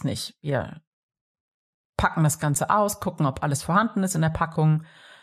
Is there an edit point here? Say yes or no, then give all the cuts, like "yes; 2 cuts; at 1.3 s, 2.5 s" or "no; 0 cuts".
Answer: no; 0 cuts